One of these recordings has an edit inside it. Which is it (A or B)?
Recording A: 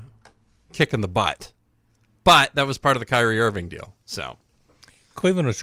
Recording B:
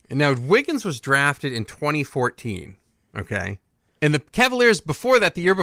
B